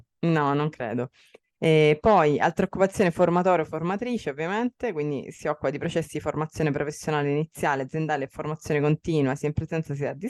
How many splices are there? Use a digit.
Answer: 0